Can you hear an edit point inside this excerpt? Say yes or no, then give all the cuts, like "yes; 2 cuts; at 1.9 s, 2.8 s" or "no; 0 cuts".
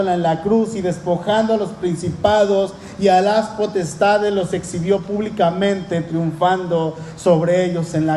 no; 0 cuts